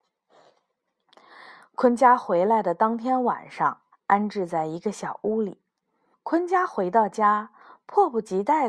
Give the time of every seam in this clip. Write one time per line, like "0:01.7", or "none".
0:03.9
0:06.1